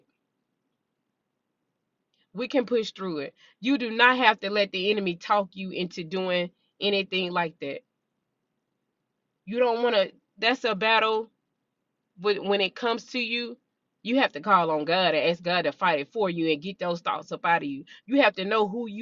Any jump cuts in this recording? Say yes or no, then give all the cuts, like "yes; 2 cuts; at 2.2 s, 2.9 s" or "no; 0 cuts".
no; 0 cuts